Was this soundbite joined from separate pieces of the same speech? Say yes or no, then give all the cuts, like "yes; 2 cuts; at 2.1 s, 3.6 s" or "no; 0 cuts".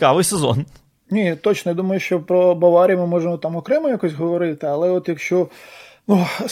no; 0 cuts